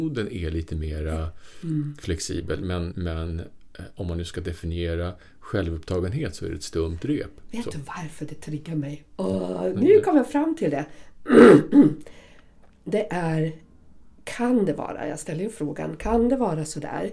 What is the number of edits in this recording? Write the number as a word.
one